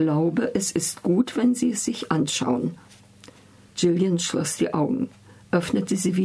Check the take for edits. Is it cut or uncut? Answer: uncut